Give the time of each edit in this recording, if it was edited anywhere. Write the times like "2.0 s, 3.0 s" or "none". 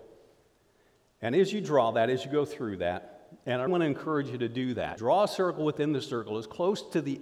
3.7 s, 5.0 s